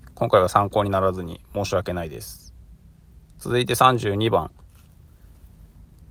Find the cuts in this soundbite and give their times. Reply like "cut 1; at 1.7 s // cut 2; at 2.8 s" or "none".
none